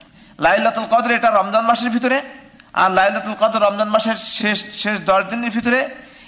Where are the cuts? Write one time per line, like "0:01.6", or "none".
none